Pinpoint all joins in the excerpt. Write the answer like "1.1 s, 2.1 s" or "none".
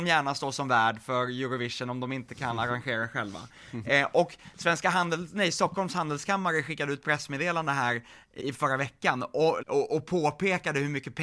8.4 s, 9.6 s